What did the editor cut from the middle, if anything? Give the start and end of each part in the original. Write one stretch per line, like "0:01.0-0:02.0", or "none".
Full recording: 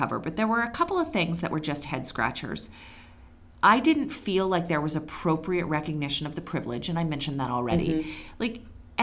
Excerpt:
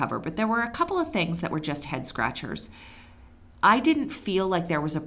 none